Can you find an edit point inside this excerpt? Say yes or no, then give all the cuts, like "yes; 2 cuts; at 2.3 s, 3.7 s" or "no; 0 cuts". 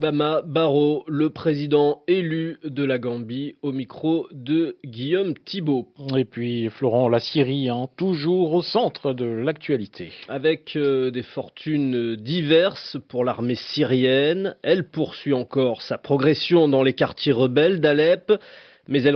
no; 0 cuts